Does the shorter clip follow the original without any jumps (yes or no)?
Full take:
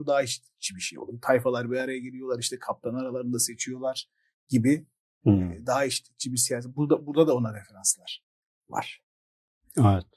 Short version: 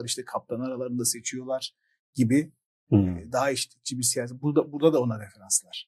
yes